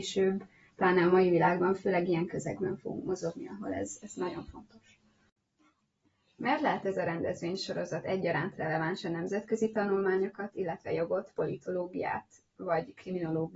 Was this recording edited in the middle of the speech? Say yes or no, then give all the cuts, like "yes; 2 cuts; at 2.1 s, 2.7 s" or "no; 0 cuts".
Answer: no; 0 cuts